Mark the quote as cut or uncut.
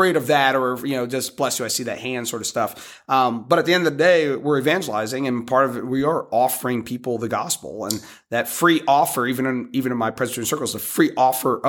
uncut